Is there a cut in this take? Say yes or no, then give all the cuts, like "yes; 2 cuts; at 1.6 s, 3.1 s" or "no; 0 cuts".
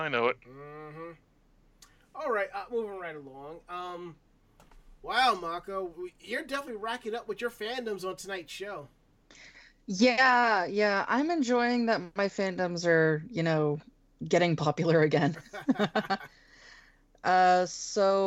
no; 0 cuts